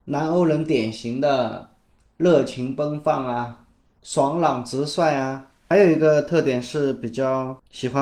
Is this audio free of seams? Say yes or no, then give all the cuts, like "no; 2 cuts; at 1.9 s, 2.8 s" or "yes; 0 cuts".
yes; 0 cuts